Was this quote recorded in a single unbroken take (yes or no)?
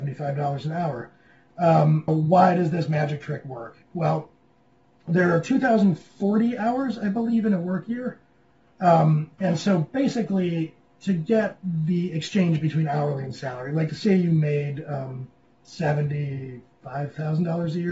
no